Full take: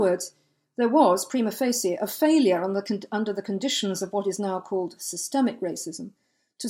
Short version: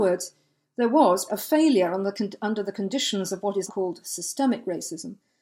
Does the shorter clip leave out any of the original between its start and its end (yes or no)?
yes